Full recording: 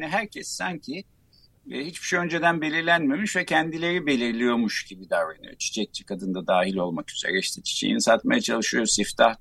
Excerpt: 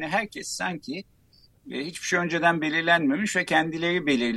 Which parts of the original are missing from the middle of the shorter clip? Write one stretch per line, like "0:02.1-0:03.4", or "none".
none

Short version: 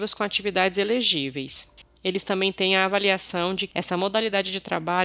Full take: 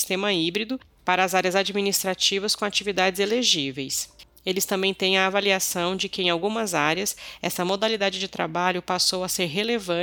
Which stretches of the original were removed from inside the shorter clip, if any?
0:06.1-0:07.4

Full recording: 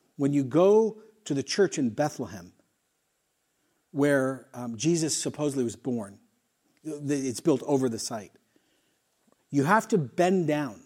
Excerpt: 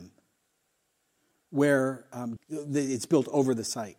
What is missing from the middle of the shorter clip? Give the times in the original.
0:04.8-0:06.7

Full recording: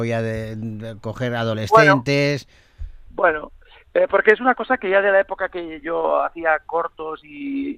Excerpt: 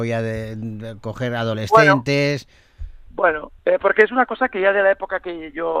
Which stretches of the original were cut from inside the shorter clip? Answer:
0:03.6-0:03.9

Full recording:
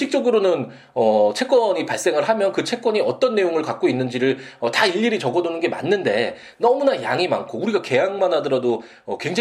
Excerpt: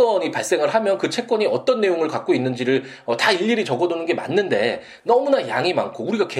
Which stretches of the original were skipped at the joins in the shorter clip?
none

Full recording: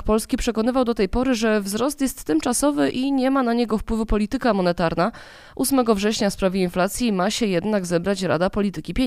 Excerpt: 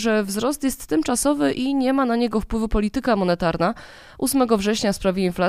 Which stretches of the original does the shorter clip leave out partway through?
none

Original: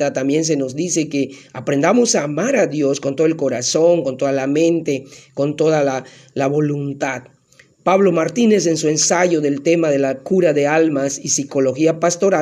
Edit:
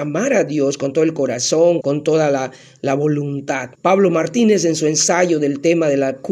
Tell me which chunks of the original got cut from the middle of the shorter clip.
0:04.0-0:05.3
0:07.3-0:07.8

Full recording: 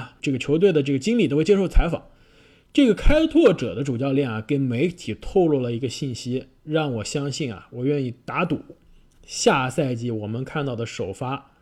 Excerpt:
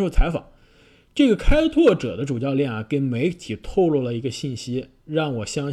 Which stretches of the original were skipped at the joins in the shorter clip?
none

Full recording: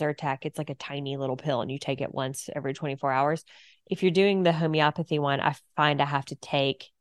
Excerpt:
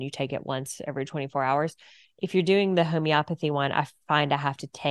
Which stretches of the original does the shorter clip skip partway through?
none

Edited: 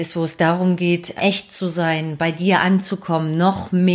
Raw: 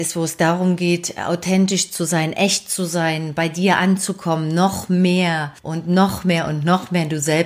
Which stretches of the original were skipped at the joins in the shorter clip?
0:01.2-0:02.3

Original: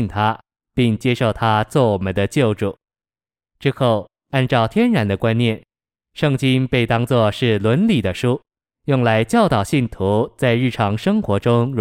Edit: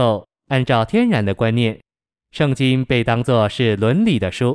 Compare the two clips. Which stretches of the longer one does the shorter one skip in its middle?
none

